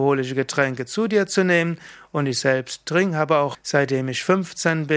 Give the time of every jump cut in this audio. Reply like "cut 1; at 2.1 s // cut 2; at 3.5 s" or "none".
cut 1; at 3.5 s